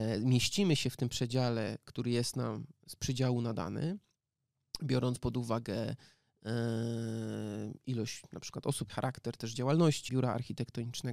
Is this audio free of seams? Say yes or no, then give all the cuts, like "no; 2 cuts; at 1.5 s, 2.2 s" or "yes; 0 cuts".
no; 2 cuts; at 8.9 s, 10.1 s